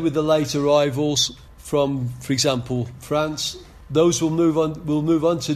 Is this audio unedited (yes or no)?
yes